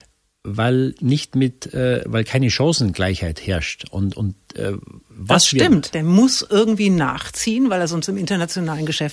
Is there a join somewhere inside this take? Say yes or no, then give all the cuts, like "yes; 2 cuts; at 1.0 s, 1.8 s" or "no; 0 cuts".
yes; 1 cut; at 5.9 s